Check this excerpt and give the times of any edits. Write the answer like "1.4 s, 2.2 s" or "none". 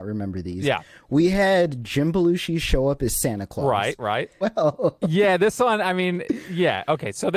4.4 s

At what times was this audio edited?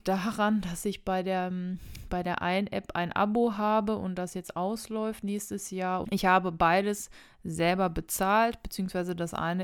6.0 s

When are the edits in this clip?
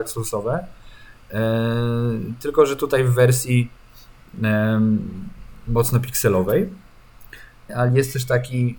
5.7 s, 7.7 s

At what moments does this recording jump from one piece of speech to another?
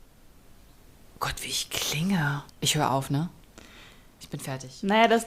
2.5 s

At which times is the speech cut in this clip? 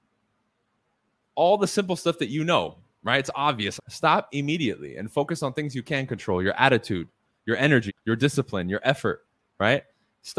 3.8 s, 7.9 s

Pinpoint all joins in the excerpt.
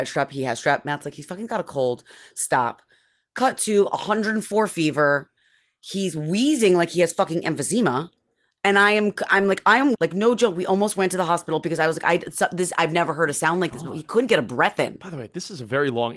9.9 s

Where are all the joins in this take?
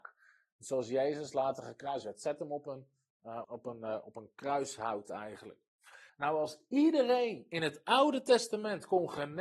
3.4 s, 6.1 s

